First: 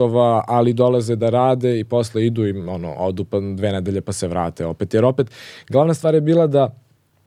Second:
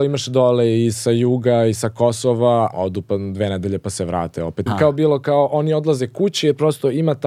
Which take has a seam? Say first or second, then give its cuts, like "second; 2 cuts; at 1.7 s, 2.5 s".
second; 2 cuts; at 2.7 s, 4.7 s